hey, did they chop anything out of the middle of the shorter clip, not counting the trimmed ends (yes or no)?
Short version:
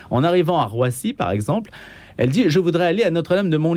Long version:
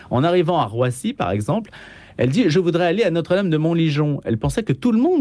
no